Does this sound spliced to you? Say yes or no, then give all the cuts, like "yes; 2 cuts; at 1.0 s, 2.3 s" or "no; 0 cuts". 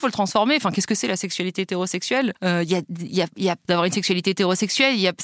yes; 2 cuts; at 2.4 s, 3.6 s